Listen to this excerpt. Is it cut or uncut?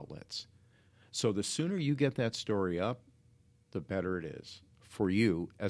uncut